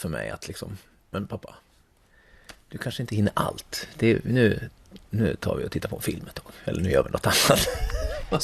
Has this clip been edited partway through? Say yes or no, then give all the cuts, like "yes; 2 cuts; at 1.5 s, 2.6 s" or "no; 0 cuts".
no; 0 cuts